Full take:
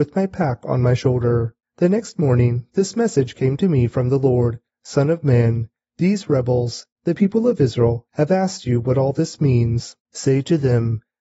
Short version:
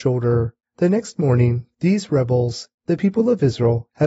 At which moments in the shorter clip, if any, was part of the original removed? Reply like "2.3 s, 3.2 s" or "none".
1.7 s